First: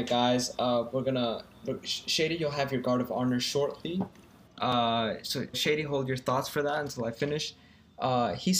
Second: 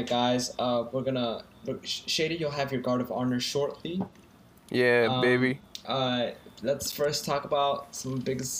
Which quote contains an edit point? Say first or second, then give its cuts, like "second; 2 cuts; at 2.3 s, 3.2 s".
first; 2 cuts; at 4.5 s, 5.5 s